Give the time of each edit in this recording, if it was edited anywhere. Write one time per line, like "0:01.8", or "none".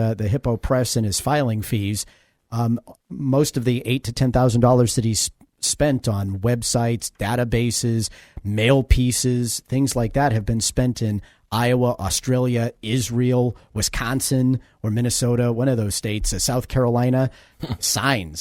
0:03.0